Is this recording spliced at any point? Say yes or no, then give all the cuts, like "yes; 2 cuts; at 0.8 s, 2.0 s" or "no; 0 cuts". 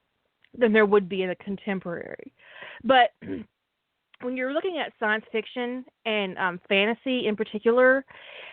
no; 0 cuts